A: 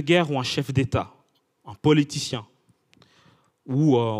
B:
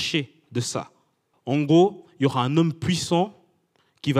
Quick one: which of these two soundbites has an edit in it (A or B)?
B